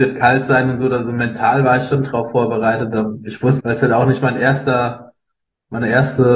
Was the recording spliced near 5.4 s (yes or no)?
no